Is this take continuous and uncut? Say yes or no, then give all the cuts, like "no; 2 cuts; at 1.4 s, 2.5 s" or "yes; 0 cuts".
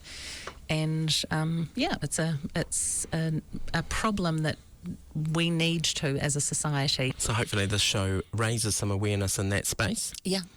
no; 1 cut; at 7.1 s